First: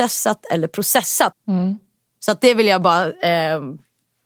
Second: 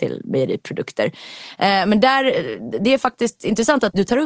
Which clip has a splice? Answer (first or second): first